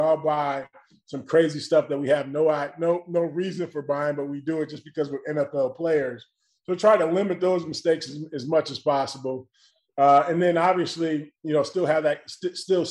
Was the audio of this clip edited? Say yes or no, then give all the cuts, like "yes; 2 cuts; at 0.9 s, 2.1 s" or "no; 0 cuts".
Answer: no; 0 cuts